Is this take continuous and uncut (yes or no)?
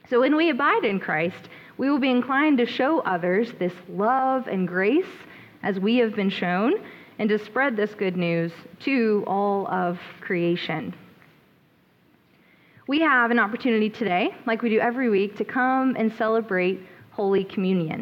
yes